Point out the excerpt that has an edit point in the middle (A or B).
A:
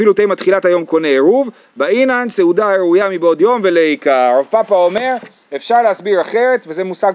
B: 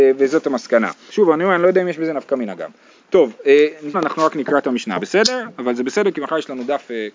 B